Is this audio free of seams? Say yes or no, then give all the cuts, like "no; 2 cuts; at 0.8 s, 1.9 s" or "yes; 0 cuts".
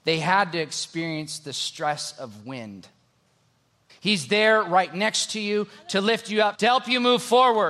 no; 2 cuts; at 3.9 s, 6.5 s